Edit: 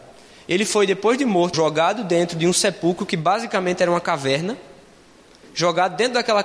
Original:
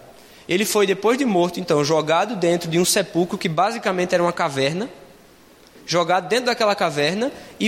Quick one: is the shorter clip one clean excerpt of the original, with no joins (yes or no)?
no